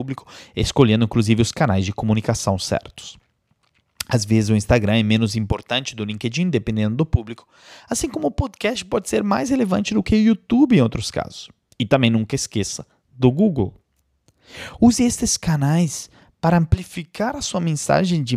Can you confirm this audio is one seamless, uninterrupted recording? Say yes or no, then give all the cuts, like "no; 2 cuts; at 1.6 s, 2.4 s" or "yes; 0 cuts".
yes; 0 cuts